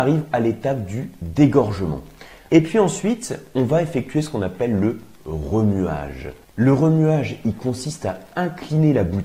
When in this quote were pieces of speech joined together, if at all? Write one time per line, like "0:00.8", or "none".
0:02.5